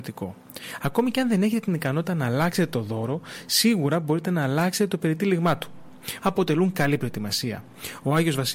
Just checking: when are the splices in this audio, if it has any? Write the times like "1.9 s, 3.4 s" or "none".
6.2 s